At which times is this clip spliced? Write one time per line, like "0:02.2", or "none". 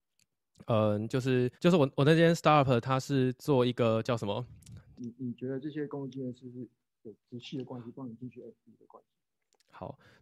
0:01.5
0:05.0